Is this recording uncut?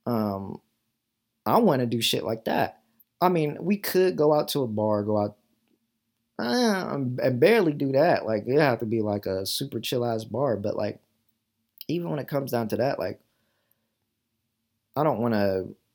no; 1 cut; at 3.0 s

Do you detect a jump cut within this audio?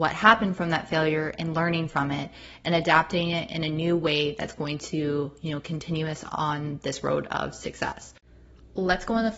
no; 0 cuts

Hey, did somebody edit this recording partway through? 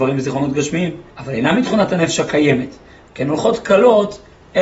yes; 1 cut; at 1.1 s

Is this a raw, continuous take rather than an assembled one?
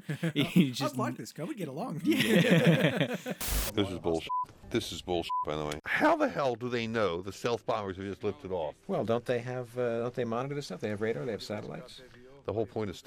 yes; 0 cuts

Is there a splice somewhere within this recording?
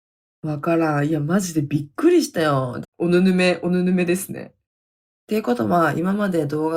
yes; 2 cuts; at 2.8 s, 5.1 s

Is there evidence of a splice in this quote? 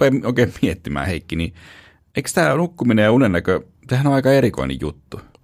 no; 0 cuts

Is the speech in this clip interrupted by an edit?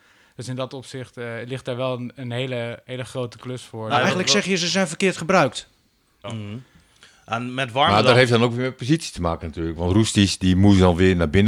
yes; 1 cut; at 6.2 s

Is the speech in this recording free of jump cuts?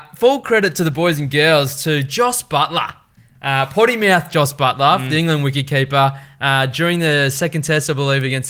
yes; 0 cuts

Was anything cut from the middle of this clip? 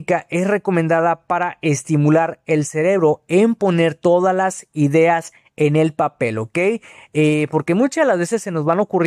no; 0 cuts

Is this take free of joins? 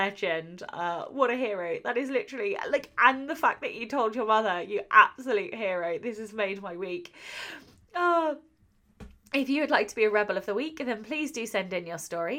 yes; 0 cuts

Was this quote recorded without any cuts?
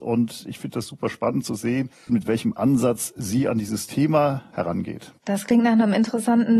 no; 2 cuts; at 2.1 s, 4.5 s

